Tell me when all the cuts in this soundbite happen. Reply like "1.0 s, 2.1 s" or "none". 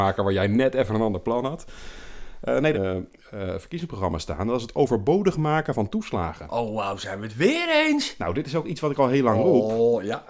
2.7 s